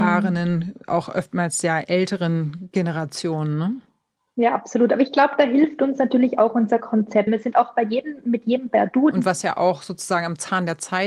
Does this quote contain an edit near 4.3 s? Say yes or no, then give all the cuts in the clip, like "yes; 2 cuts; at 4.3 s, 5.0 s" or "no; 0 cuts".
no; 2 cuts; at 7.3 s, 9.1 s